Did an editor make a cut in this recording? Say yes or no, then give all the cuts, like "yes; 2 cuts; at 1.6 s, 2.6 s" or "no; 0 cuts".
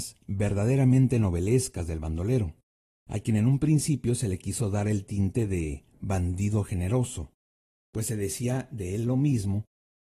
no; 0 cuts